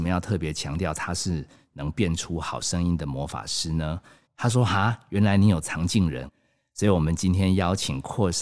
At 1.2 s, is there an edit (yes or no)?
no